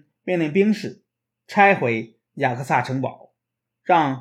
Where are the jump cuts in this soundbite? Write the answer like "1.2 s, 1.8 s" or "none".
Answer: none